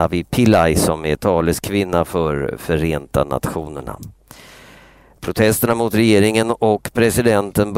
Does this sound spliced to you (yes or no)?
no